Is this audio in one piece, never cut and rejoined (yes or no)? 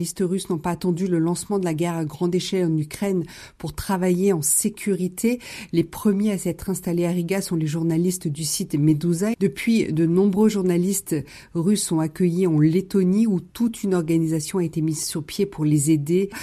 no